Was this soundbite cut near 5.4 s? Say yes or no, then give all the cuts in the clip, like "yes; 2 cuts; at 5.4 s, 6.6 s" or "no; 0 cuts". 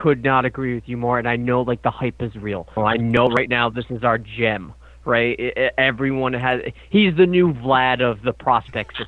no; 1 cut; at 2.8 s